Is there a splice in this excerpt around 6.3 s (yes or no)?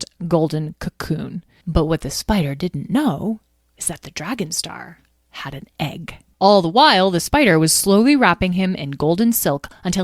yes